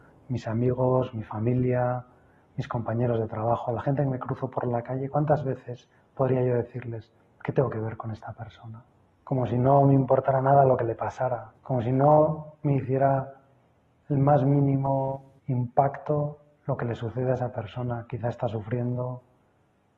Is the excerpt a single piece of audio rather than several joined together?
no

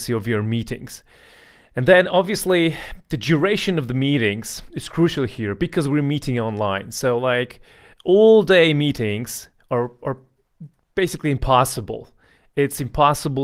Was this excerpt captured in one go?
yes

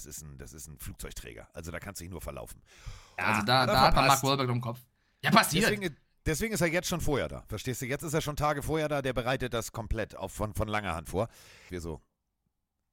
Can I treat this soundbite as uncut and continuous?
no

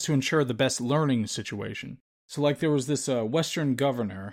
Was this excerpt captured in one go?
yes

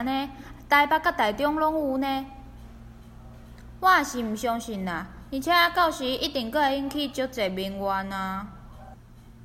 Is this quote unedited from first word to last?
yes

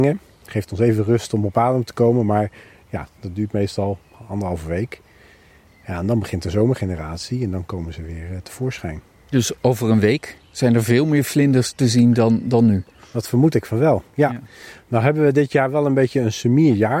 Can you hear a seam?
no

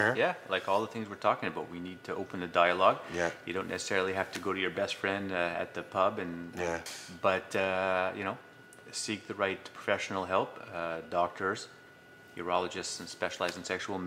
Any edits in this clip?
yes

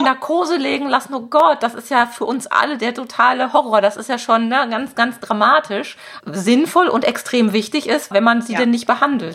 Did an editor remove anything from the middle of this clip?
yes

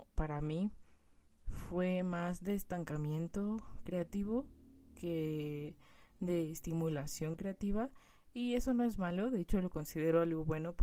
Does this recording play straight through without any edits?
yes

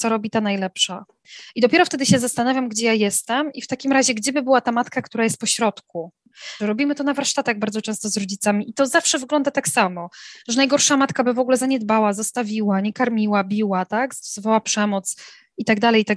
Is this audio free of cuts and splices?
no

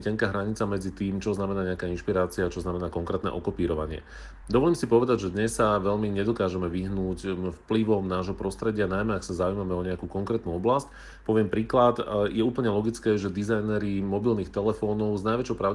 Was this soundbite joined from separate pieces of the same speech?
no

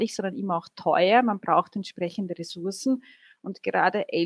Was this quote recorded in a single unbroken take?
yes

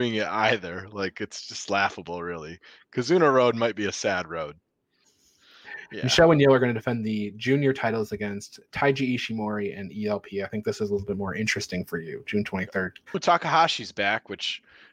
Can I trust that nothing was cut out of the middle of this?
no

